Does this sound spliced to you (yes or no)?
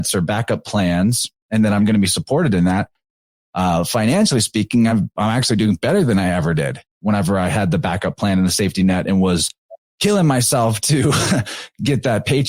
no